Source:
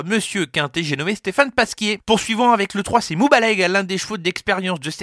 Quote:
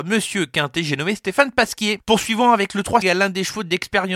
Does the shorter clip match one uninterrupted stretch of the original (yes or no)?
no